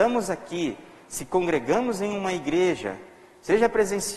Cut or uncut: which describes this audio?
uncut